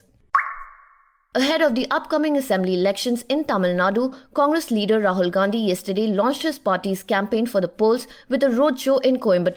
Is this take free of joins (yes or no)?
yes